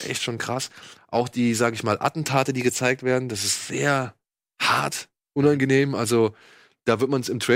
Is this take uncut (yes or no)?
yes